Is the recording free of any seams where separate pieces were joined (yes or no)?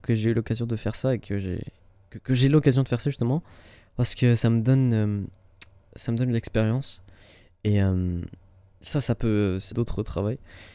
no